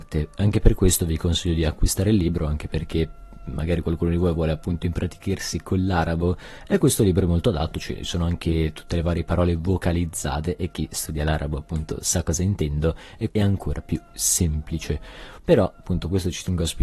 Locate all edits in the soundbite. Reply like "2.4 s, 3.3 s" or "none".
13.3 s, 15.4 s